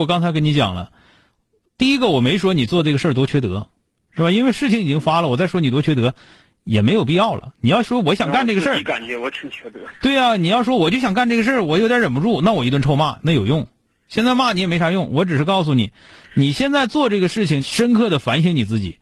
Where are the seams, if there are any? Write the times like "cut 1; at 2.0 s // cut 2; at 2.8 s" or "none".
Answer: cut 1; at 17.6 s